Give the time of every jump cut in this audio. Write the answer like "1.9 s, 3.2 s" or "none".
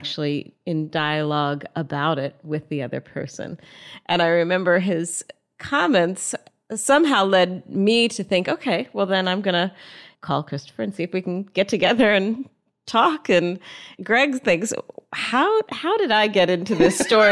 none